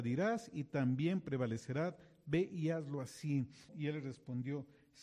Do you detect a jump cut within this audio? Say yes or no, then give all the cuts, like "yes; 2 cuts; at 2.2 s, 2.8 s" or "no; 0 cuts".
yes; 1 cut; at 3.7 s